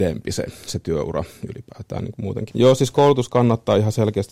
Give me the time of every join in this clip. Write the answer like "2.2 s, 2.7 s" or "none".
2.5 s